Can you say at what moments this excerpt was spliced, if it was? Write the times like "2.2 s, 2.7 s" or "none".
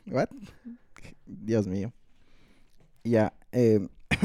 none